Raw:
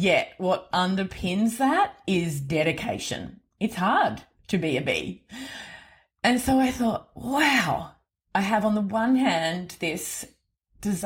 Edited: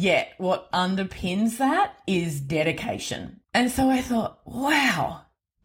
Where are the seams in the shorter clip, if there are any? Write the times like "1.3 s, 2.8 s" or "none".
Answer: 3.4 s